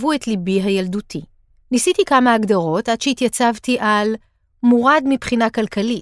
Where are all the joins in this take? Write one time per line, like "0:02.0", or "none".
0:01.6